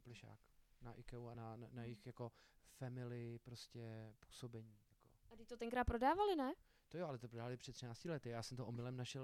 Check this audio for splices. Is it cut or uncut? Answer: uncut